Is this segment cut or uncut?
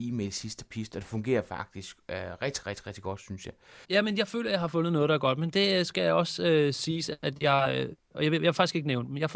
cut